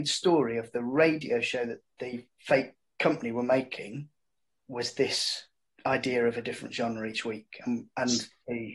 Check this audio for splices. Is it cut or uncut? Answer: uncut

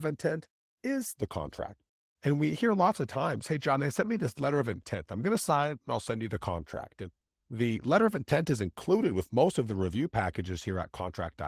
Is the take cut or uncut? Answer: uncut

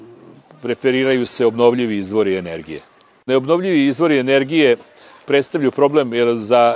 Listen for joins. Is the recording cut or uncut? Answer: uncut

